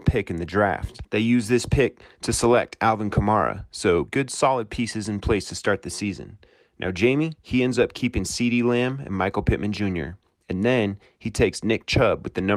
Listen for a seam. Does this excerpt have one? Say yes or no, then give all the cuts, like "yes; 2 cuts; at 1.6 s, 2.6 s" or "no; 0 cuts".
no; 0 cuts